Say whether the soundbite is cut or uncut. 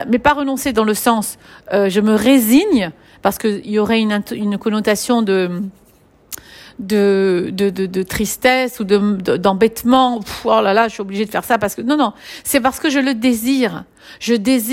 uncut